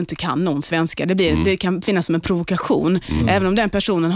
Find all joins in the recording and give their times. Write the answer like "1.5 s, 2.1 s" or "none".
none